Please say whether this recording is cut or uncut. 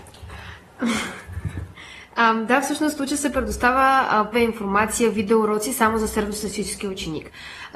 cut